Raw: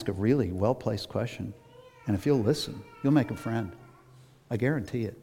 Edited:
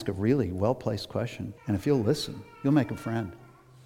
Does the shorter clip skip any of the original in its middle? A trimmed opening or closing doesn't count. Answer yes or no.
yes